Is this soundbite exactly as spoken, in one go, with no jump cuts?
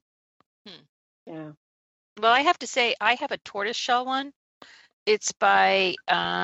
yes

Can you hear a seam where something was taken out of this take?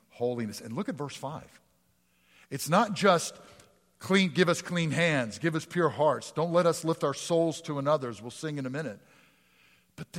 no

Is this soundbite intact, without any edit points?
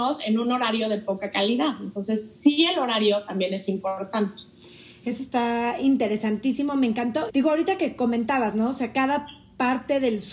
no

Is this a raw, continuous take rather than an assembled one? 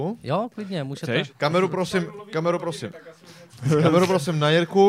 no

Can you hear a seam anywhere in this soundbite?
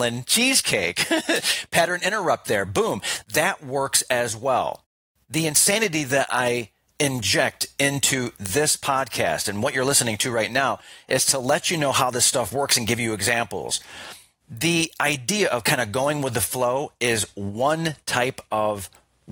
no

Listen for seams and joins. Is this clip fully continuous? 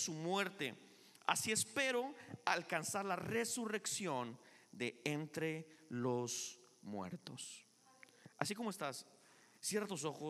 yes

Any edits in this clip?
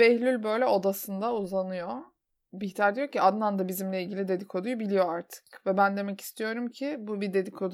no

